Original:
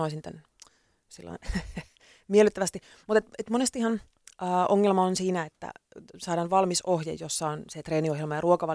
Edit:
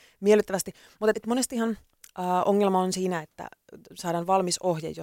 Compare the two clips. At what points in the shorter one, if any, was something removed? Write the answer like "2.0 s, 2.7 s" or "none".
1.1 s

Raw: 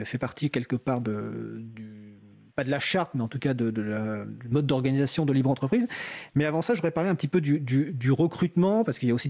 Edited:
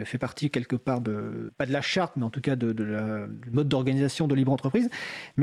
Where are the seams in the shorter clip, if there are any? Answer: 1.5 s

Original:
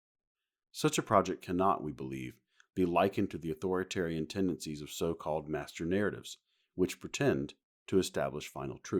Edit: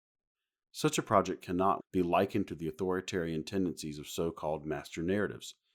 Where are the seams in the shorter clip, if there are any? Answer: 1.8 s

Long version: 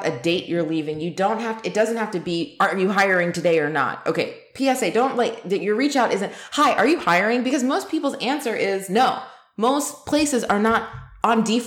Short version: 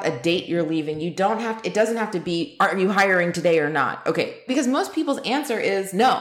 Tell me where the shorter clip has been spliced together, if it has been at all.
4.5 s

